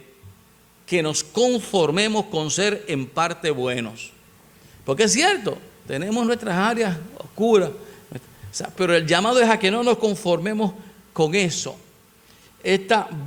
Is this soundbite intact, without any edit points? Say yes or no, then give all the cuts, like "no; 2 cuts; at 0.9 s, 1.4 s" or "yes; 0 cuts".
no; 1 cut; at 8.8 s